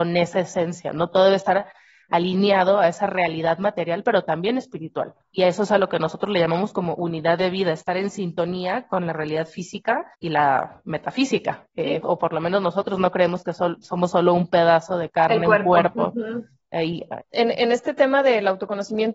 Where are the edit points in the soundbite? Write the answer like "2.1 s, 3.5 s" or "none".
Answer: 12.0 s, 17.2 s